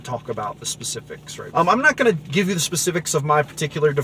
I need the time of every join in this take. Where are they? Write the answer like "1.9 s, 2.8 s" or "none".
1.5 s